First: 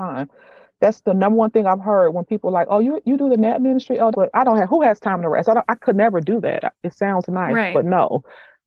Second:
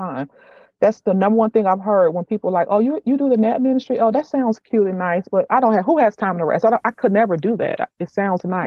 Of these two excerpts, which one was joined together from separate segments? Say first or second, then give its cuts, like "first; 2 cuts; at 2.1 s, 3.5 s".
first; 1 cut; at 4.1 s